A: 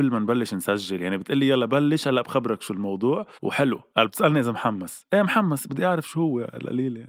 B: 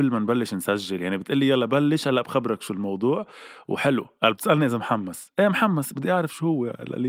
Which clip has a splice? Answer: A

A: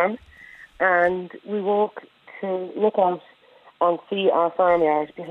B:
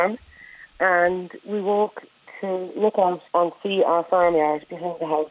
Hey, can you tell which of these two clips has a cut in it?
B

